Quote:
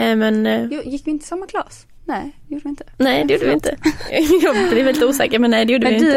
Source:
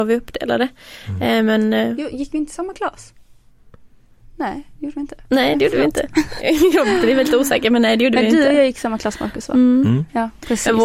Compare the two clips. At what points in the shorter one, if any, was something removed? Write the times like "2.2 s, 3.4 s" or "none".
2.0 s